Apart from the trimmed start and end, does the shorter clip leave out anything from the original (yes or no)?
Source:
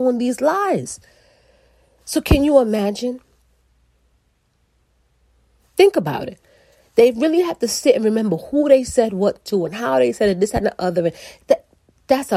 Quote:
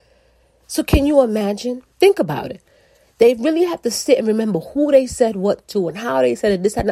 yes